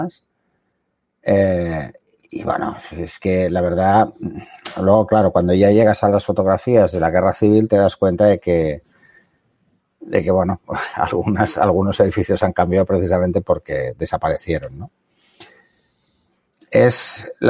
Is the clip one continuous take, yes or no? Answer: yes